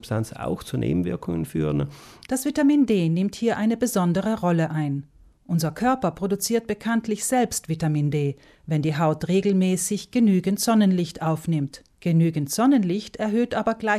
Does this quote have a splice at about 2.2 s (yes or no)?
yes